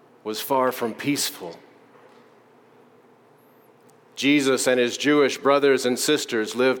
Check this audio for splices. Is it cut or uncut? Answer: uncut